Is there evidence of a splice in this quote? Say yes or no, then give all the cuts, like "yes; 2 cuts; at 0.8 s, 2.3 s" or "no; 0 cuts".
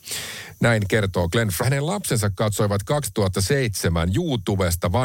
yes; 1 cut; at 1.6 s